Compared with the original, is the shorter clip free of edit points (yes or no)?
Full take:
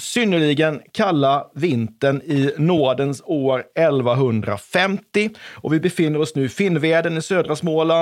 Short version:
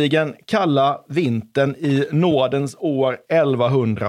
yes